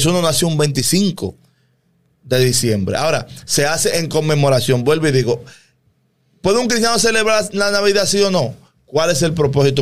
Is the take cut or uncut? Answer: uncut